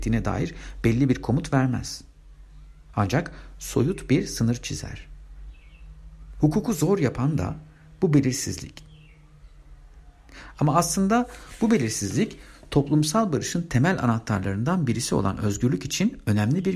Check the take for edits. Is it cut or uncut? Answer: uncut